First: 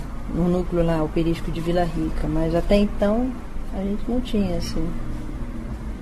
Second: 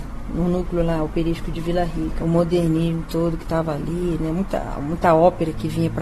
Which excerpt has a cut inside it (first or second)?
second